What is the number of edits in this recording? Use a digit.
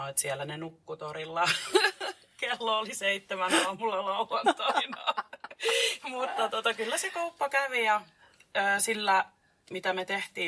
0